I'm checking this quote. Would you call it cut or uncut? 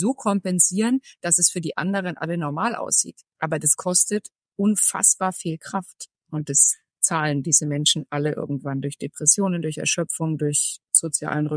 uncut